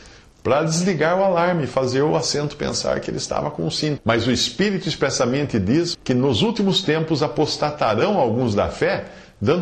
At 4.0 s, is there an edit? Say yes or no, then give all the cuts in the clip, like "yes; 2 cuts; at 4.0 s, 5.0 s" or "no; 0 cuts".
yes; 2 cuts; at 4.0 s, 5.9 s